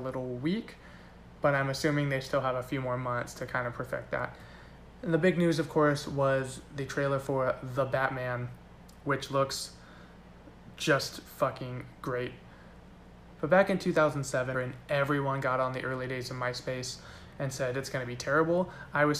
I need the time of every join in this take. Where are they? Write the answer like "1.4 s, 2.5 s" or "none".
13.4 s, 14.5 s